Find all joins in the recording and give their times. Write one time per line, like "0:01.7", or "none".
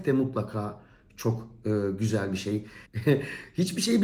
0:02.9